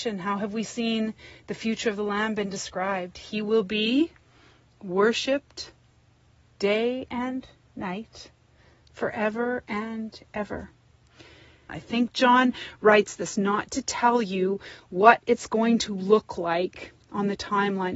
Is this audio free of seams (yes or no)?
no